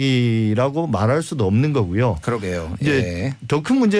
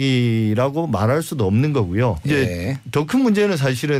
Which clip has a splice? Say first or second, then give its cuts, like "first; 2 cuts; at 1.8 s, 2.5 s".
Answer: second; 1 cut; at 2.2 s